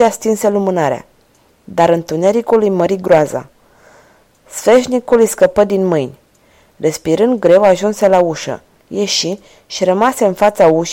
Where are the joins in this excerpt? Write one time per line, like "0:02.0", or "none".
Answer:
none